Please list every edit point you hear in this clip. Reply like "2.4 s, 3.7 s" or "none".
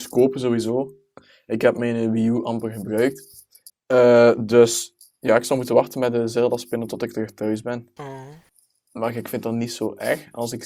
3.7 s, 8.0 s